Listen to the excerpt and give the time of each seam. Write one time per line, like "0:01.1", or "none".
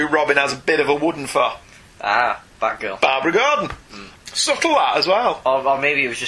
0:04.1